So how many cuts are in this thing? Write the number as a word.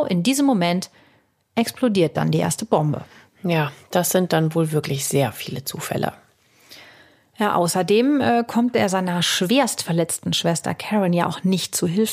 zero